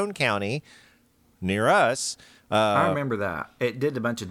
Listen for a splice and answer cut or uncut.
uncut